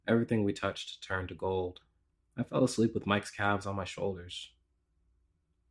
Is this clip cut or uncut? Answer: cut